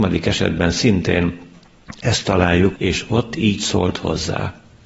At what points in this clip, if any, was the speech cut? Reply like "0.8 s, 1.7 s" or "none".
2.8 s